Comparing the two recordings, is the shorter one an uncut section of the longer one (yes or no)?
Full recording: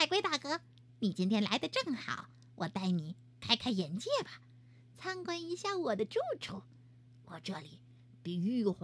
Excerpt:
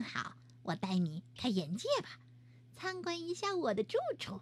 no